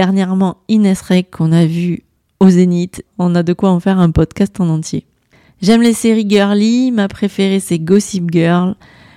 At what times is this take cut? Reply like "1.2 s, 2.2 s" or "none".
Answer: 3.1 s